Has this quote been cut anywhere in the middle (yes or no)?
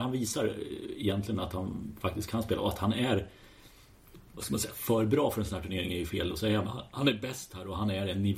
no